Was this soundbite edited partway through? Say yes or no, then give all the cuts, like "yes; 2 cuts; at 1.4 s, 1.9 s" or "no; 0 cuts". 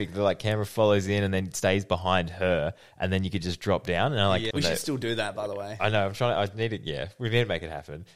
yes; 1 cut; at 4.5 s